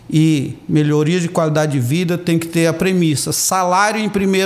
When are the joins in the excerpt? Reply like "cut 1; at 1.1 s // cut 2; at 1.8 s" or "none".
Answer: none